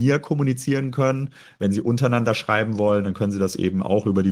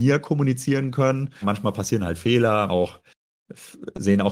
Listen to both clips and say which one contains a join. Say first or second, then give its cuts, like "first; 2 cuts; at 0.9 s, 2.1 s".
second; 2 cuts; at 1.4 s, 2.7 s